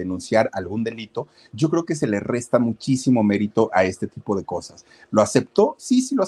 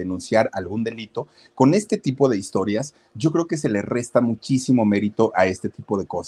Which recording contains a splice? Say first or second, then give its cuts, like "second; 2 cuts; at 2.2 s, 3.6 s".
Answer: first; 1 cut; at 1.5 s